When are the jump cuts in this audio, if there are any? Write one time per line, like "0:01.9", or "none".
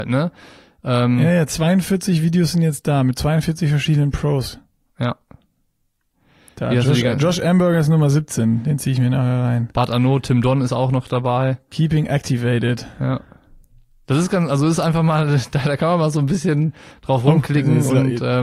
none